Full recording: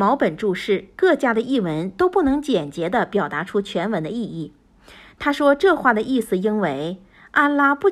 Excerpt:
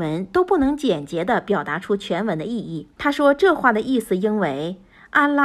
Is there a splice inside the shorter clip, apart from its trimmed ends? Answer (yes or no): yes